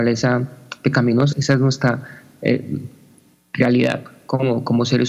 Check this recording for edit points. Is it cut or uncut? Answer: cut